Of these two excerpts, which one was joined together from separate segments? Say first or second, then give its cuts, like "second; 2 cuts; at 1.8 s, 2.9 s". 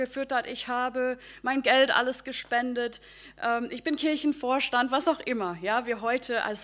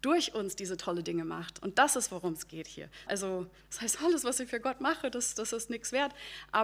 second; 1 cut; at 3.1 s